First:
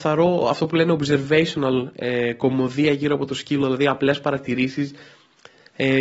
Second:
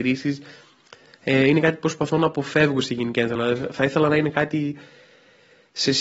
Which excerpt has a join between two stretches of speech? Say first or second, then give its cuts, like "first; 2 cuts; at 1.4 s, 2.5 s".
second; 1 cut; at 3.4 s